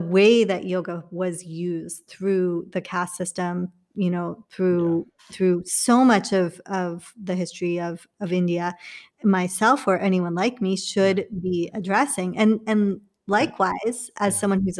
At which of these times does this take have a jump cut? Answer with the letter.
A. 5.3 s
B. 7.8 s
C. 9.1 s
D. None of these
C